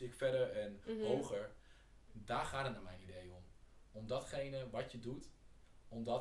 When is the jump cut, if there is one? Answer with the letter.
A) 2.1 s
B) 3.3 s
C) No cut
A